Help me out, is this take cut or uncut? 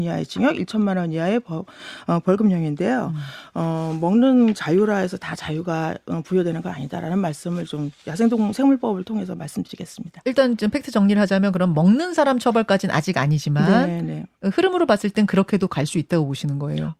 uncut